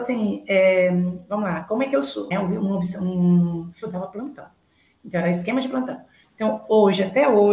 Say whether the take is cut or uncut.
cut